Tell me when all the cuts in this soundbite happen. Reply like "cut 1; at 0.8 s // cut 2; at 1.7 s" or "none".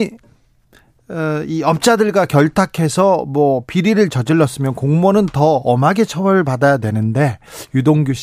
none